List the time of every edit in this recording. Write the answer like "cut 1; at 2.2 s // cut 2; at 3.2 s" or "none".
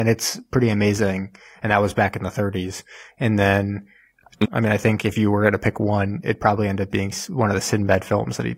cut 1; at 4.4 s

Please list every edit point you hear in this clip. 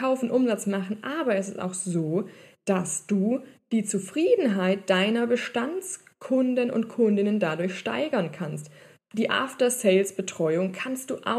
cut 1; at 9.0 s

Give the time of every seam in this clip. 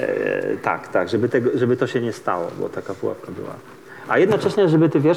none

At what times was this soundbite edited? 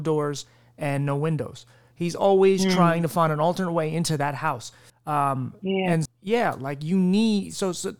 cut 1; at 4.9 s // cut 2; at 6.1 s

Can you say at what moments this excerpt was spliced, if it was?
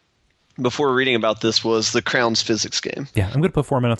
none

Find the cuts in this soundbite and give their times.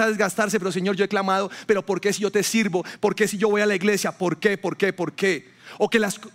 none

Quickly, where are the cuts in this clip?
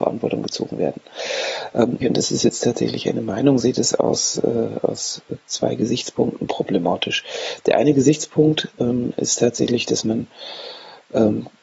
cut 1; at 2.0 s

